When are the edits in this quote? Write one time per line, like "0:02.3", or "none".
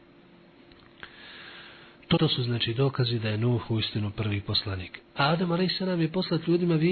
0:02.2
0:05.0